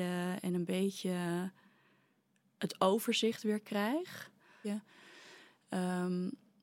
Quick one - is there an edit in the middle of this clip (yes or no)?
yes